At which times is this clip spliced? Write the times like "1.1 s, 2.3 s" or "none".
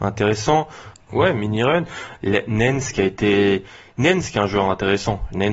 0.9 s